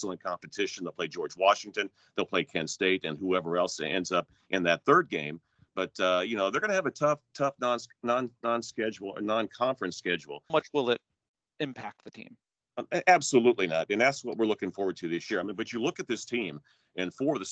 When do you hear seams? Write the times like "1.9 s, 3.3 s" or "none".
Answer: 10.5 s